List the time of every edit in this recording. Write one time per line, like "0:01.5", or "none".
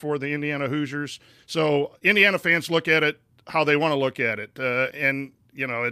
0:01.4
0:04.9